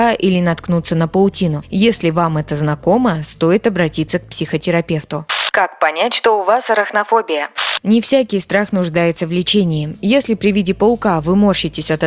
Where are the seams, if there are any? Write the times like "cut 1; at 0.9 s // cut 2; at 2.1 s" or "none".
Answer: cut 1; at 5.5 s